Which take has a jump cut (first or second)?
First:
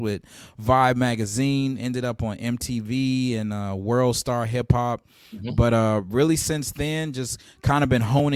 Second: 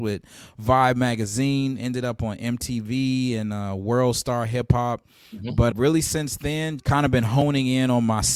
second